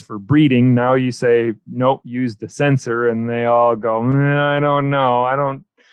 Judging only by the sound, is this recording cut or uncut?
uncut